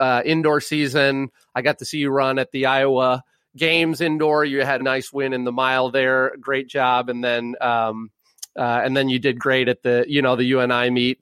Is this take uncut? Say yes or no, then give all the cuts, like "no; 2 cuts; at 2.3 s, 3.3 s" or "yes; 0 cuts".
no; 1 cut; at 4.8 s